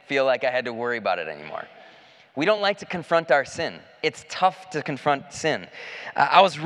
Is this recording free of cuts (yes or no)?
yes